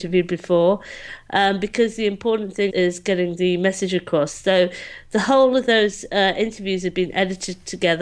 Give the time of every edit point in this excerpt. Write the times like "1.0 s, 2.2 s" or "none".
2.7 s